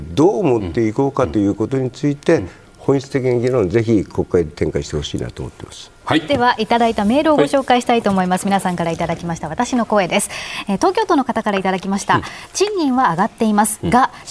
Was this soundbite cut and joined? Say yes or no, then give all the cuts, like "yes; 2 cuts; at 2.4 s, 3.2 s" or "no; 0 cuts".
no; 0 cuts